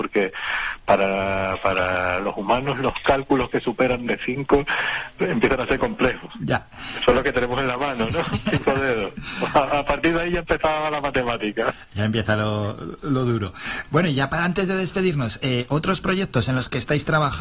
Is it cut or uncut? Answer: uncut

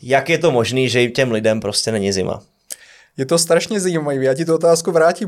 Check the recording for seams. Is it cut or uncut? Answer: uncut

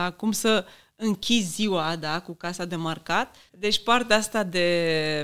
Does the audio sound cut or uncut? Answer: cut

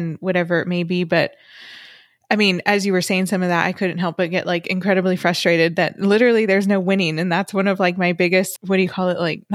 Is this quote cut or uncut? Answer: cut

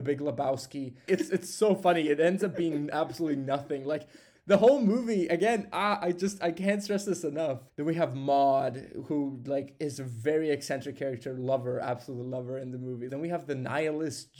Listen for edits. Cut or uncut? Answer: cut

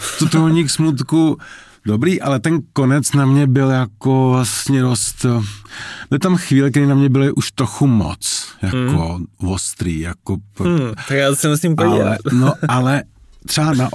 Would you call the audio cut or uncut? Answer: uncut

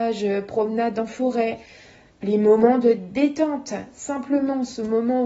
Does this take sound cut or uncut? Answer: uncut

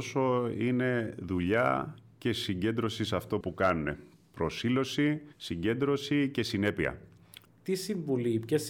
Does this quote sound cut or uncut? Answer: cut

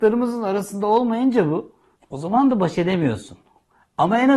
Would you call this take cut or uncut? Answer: cut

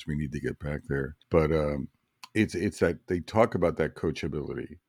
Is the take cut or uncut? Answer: cut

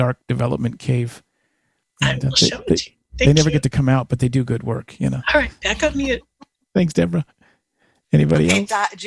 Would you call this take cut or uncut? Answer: uncut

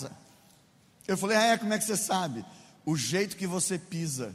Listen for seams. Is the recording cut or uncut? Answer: uncut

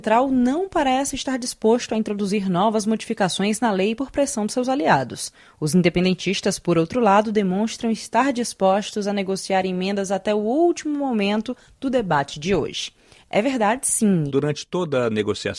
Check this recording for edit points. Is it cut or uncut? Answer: cut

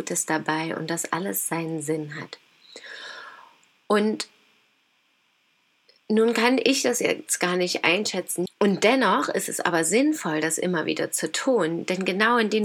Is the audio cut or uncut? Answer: cut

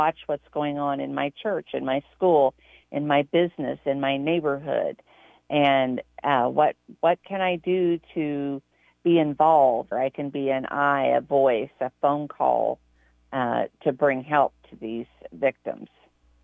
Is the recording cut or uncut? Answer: cut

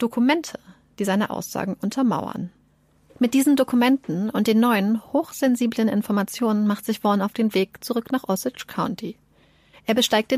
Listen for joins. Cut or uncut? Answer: uncut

